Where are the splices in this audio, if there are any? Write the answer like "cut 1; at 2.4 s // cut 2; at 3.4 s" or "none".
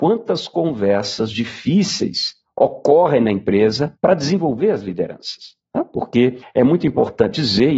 none